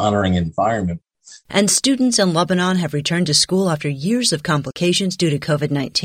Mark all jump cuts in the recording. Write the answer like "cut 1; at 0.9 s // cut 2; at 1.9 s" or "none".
cut 1; at 1.4 s

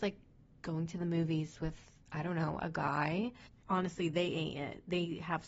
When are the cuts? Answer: cut 1; at 3.5 s

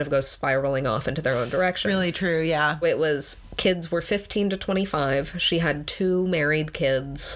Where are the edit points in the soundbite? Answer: cut 1; at 2.8 s

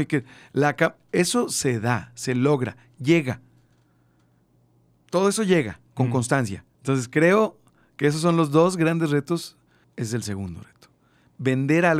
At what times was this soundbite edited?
cut 1; at 6.7 s // cut 2; at 9.8 s

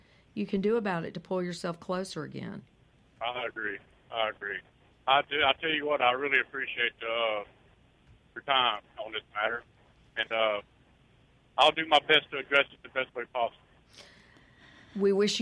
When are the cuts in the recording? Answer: none

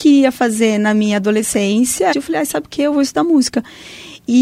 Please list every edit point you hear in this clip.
cut 1; at 2.1 s

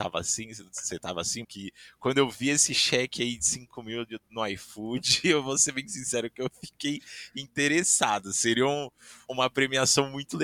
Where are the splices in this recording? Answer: cut 1; at 1.4 s // cut 2; at 9.3 s

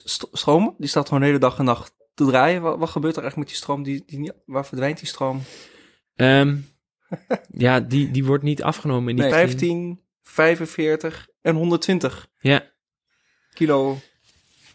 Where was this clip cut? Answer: cut 1; at 9.3 s

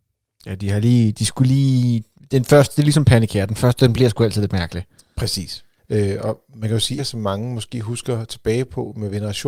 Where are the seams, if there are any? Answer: cut 1; at 5.8 s // cut 2; at 7.0 s

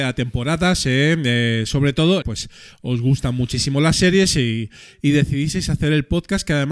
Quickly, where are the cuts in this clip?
cut 1; at 2.2 s

